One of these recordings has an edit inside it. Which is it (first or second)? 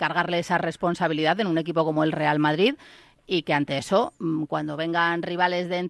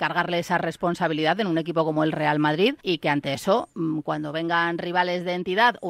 second